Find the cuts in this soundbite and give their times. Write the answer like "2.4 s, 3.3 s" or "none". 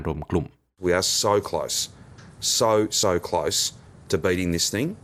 none